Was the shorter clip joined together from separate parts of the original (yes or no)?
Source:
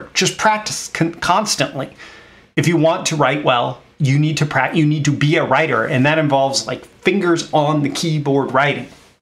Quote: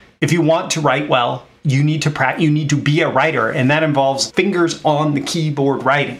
yes